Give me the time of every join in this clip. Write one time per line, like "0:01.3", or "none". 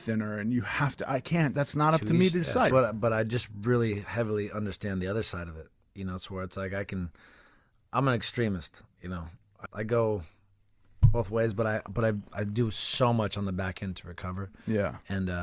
0:02.7
0:09.7